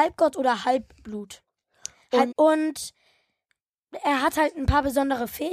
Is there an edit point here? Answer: yes; 1 cut; at 2.3 s

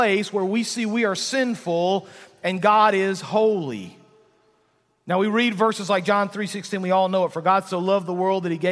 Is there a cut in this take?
no; 0 cuts

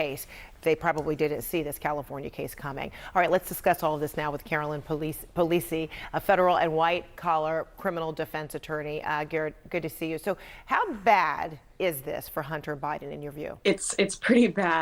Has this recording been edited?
yes; 1 cut; at 13.6 s

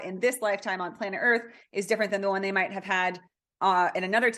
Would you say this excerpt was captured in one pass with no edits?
yes; 0 cuts

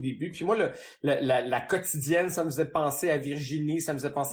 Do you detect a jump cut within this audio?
no; 0 cuts

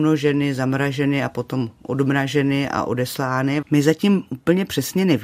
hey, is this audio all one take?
no; 1 cut; at 3.6 s

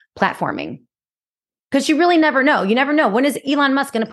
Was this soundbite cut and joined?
no; 0 cuts

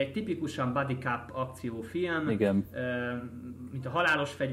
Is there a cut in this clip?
no; 0 cuts

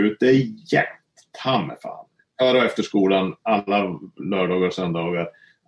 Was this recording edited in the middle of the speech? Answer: no; 0 cuts

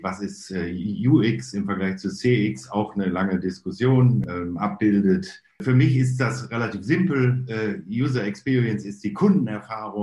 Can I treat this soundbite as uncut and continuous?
yes; 0 cuts

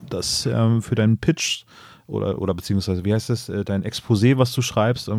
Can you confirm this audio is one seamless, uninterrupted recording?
yes; 0 cuts

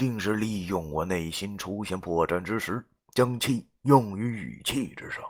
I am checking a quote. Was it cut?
no; 0 cuts

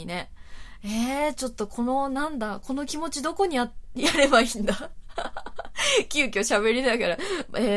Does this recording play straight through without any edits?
yes; 0 cuts

